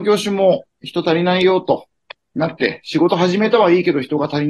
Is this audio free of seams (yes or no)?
yes